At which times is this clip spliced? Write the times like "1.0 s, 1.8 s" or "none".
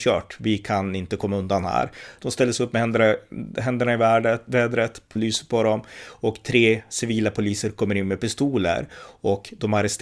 2.2 s, 5.2 s